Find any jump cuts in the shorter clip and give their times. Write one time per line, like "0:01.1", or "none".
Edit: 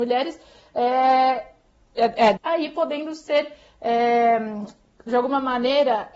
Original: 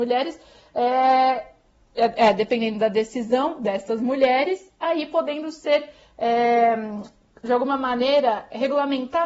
0:02.4

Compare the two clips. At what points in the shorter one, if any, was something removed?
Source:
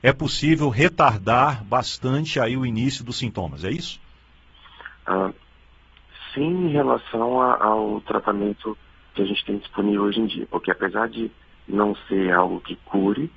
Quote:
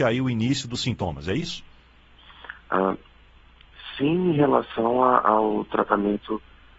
none

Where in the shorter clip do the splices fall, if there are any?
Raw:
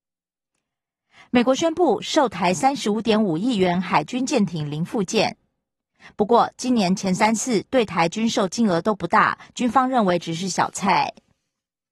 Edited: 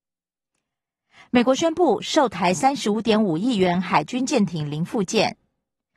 none

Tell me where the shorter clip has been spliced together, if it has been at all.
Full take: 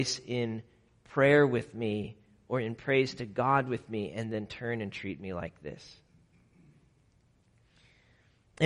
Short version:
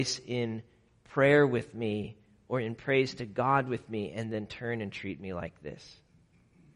none

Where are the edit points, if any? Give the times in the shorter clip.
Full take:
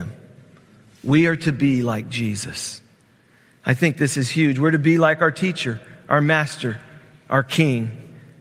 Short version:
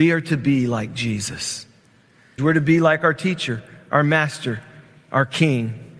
0:02.4

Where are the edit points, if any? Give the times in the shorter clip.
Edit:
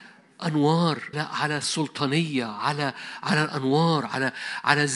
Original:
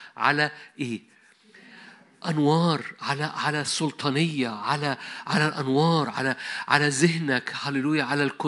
0:01.1

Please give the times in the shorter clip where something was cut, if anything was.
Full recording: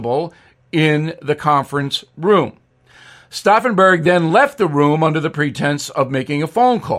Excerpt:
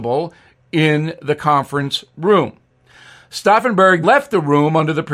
0:04.0

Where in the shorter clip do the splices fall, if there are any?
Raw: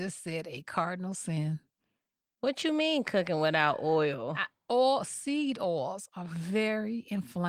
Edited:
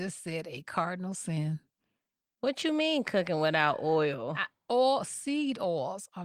none

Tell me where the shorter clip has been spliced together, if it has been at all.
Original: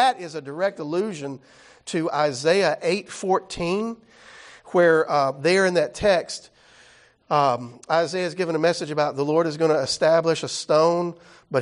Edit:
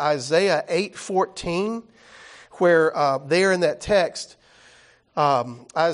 none

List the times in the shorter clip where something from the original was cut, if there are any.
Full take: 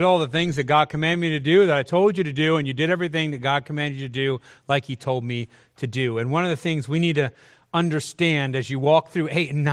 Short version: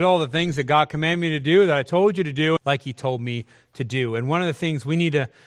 0:02.6

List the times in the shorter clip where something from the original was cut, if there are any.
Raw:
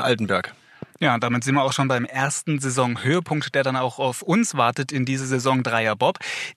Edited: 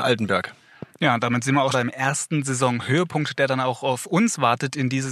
0:01.7

